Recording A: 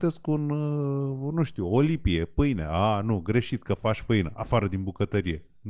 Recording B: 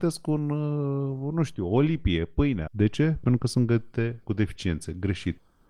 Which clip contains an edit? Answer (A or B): B